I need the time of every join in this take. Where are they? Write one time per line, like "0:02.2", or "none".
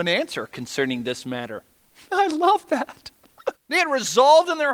0:03.5